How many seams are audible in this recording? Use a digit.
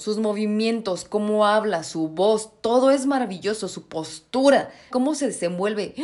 1